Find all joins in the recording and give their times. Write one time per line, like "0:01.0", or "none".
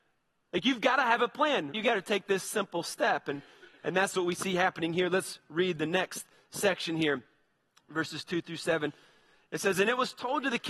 0:01.7